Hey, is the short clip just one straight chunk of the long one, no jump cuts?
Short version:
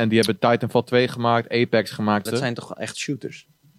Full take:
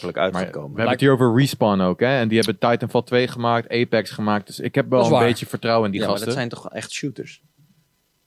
no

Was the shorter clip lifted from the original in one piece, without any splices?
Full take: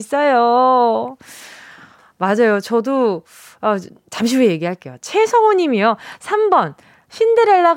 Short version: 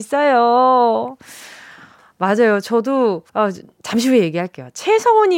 no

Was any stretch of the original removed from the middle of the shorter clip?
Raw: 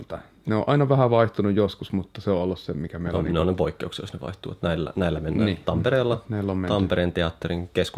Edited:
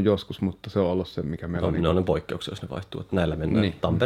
yes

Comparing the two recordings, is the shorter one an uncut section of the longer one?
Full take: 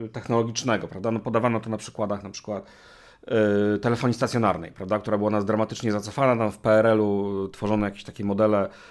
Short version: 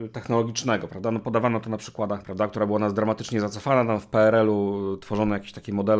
no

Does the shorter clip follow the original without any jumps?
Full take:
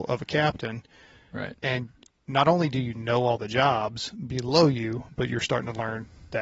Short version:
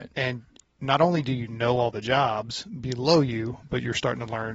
yes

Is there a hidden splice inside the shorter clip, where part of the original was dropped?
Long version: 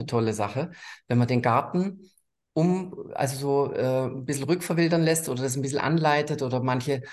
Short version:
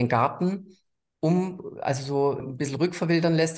yes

